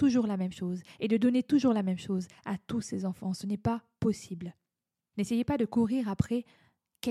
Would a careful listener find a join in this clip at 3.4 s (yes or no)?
no